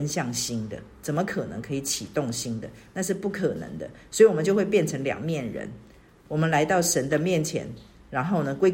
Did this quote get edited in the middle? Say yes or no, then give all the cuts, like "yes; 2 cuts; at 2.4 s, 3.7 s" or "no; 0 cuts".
no; 0 cuts